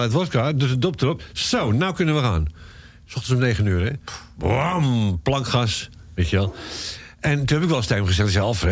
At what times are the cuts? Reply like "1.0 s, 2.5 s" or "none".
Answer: none